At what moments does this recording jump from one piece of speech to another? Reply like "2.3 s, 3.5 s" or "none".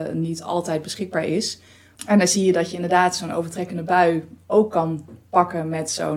2.0 s